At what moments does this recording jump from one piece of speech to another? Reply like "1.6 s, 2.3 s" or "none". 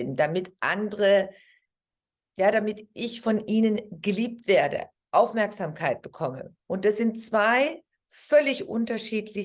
6.6 s